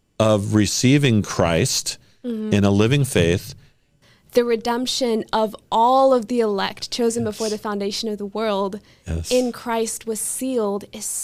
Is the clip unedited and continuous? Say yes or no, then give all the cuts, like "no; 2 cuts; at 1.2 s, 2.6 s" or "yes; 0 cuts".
no; 1 cut; at 4.0 s